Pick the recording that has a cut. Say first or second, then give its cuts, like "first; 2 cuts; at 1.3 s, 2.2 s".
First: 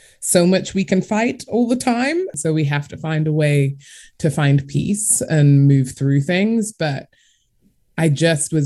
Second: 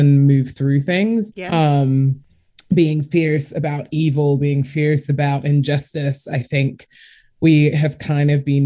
second; 1 cut; at 1.3 s